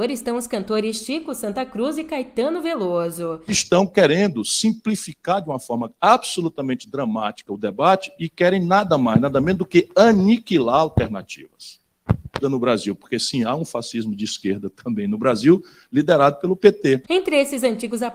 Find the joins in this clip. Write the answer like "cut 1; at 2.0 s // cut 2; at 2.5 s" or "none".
cut 1; at 3.5 s // cut 2; at 12.4 s // cut 3; at 17.0 s